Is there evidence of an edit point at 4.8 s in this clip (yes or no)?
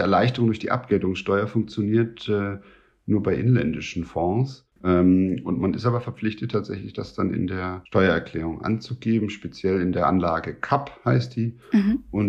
yes